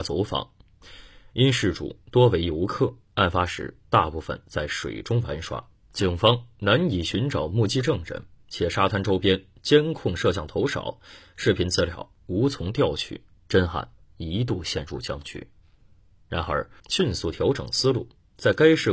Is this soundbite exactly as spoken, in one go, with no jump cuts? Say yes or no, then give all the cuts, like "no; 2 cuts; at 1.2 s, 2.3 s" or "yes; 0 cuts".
no; 1 cut; at 16.8 s